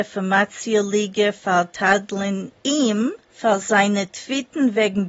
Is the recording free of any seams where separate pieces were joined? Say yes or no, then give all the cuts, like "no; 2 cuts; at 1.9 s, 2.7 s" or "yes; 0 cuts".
no; 1 cut; at 3.2 s